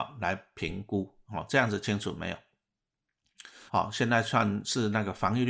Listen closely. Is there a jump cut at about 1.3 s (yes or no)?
no